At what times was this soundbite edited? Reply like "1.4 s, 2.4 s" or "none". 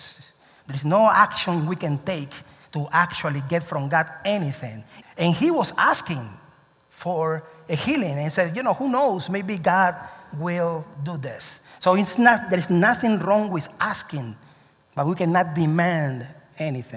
5.0 s